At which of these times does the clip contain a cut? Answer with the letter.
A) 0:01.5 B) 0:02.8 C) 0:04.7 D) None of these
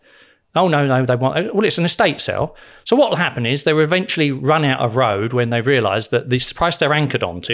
D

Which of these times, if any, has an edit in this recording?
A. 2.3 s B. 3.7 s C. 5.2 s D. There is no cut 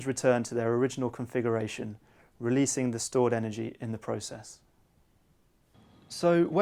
D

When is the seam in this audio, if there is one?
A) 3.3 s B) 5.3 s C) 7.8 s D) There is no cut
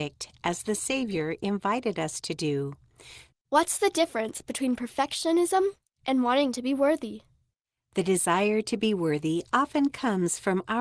A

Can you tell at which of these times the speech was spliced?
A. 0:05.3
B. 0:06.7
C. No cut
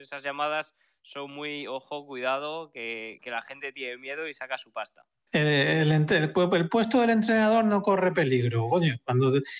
A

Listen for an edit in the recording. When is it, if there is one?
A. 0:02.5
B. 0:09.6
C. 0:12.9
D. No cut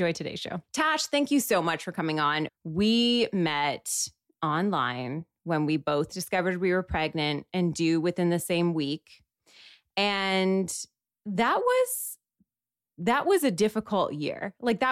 A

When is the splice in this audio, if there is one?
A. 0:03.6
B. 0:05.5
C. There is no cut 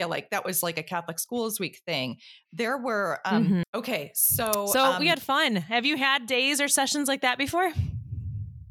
A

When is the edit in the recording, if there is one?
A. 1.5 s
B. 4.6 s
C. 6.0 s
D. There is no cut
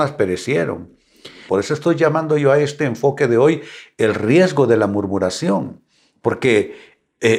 A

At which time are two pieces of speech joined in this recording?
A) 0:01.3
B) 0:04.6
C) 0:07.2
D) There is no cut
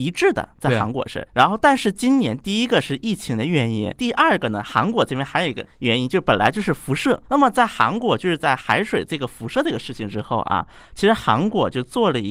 D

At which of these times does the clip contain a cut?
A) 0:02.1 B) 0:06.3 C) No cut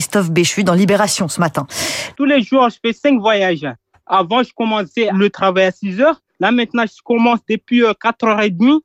A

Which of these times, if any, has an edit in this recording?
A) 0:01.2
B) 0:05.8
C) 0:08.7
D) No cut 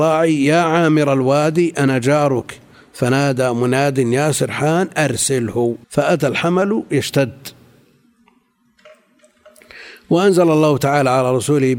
B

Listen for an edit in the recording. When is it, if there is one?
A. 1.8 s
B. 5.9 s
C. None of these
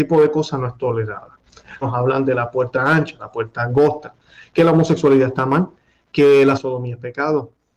A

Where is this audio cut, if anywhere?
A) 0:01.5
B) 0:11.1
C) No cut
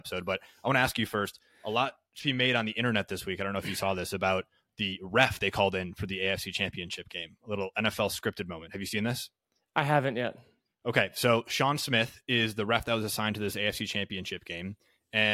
C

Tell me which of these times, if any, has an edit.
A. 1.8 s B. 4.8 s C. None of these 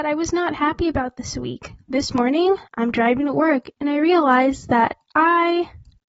A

